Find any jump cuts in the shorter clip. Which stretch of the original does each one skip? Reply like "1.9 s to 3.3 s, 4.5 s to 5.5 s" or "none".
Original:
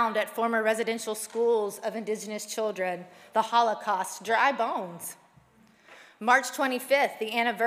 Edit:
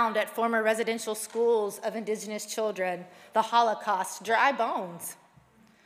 none